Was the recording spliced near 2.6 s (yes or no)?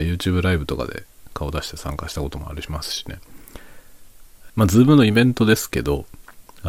no